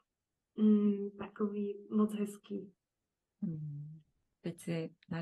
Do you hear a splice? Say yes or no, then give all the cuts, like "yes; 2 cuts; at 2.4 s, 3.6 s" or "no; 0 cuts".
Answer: yes; 1 cut; at 1.9 s